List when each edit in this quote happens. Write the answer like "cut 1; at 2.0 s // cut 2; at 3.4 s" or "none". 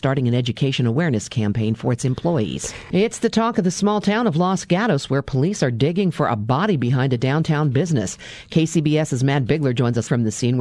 none